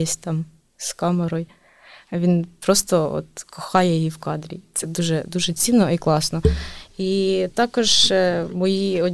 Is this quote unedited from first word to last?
yes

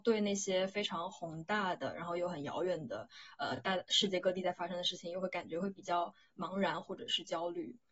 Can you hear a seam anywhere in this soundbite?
no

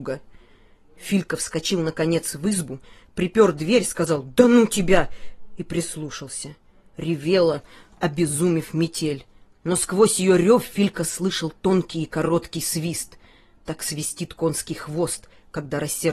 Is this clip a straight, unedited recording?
yes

